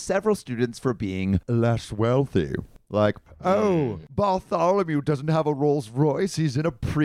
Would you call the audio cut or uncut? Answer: uncut